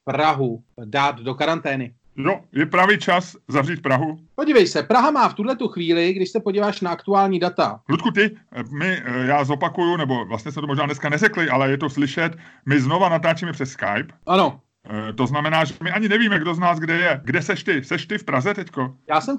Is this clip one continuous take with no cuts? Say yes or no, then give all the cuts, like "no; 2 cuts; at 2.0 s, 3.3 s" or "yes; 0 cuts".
yes; 0 cuts